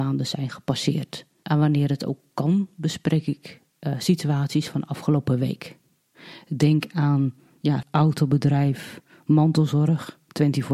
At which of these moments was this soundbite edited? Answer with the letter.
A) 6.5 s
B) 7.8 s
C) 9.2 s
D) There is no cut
B